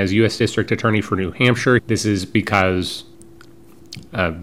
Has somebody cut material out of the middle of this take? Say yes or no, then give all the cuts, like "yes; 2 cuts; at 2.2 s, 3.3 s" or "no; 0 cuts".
yes; 1 cut; at 1.8 s